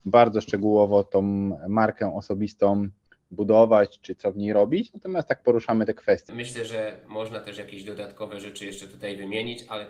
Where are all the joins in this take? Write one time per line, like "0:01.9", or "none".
0:06.3